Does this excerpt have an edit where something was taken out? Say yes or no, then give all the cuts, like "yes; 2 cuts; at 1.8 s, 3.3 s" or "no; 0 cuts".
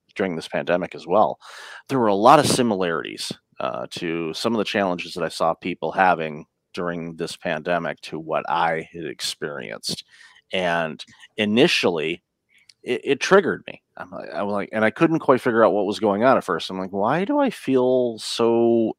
yes; 1 cut; at 1.8 s